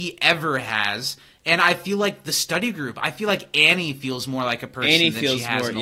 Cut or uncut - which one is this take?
uncut